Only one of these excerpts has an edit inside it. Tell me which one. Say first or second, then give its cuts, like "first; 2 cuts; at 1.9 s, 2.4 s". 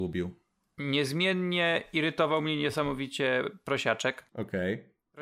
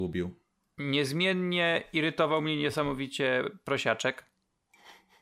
first; 1 cut; at 4.3 s